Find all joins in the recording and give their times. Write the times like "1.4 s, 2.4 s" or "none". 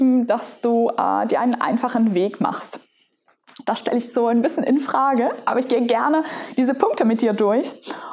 none